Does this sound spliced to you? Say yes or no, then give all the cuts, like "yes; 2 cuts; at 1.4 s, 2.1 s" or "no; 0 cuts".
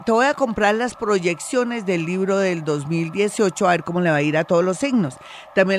no; 0 cuts